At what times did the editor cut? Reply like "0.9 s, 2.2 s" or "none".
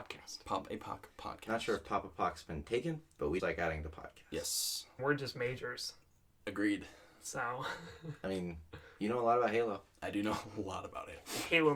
3.4 s, 5.0 s

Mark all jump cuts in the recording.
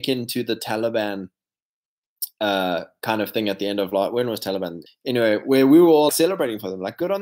4.9 s, 6.1 s

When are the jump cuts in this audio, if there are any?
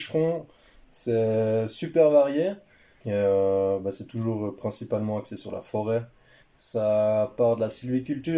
3.0 s, 6.4 s

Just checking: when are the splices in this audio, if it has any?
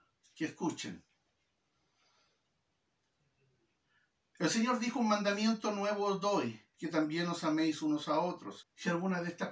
6.7 s, 8.6 s

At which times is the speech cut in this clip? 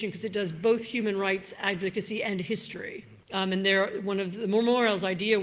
3.2 s

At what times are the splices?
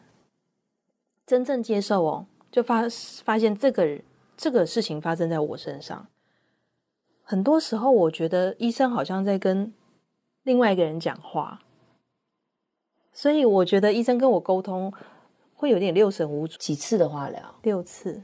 16.6 s

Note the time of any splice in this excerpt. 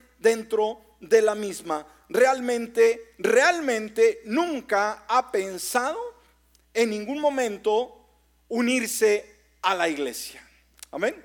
none

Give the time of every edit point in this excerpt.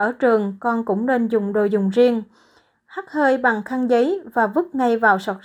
2.7 s

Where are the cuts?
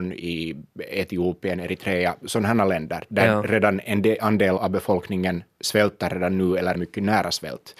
4.6 s, 6.7 s

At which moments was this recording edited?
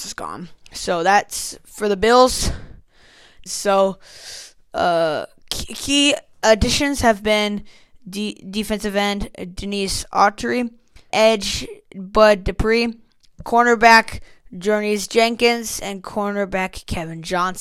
3.5 s, 11.1 s, 13.4 s

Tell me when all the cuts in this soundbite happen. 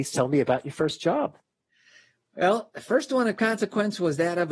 none

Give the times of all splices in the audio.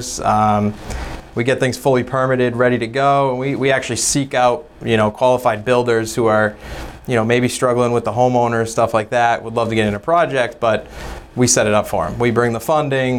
none

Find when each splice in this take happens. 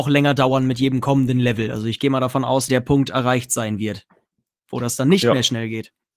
2.7 s

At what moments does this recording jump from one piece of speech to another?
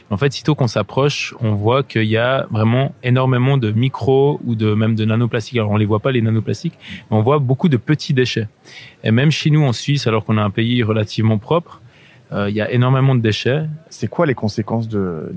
13.9 s

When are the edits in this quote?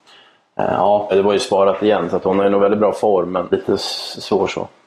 1.1 s, 3.5 s

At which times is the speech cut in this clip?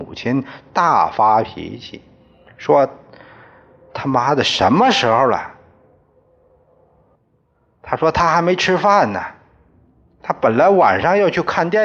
7.2 s

